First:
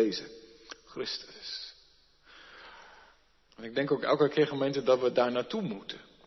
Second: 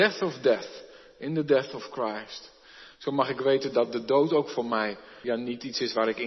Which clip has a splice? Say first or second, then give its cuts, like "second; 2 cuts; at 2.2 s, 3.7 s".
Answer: second; 1 cut; at 5.2 s